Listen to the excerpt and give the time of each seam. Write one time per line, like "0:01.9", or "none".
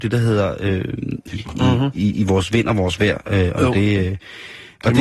0:01.3